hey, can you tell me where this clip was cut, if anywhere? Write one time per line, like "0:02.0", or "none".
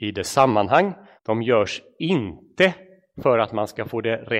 0:01.2